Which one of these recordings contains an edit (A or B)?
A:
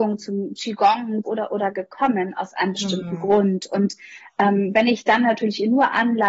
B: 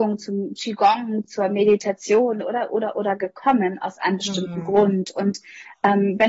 A